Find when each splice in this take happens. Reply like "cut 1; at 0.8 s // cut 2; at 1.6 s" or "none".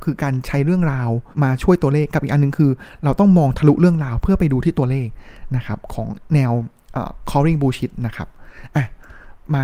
cut 1; at 1.3 s